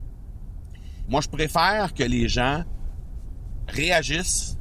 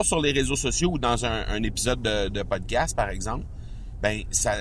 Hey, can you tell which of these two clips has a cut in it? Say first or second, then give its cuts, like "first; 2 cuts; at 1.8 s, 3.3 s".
first; 2 cuts; at 1.1 s, 3.7 s